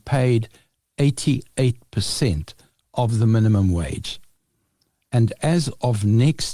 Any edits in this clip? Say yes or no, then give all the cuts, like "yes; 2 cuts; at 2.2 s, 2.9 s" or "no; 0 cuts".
no; 0 cuts